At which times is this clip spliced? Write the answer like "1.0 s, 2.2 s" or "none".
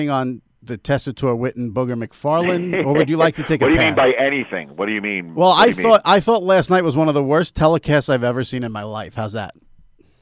none